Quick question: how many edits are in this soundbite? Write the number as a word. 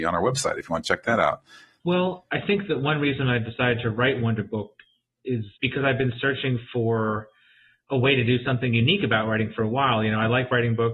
two